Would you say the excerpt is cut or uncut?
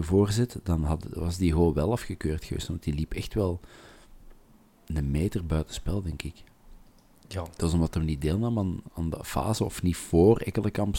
uncut